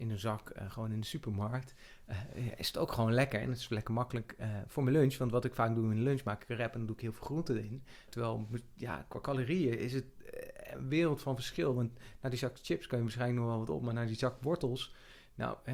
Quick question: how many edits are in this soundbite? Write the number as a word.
one